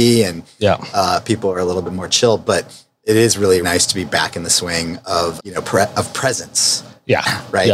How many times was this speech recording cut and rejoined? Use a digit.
2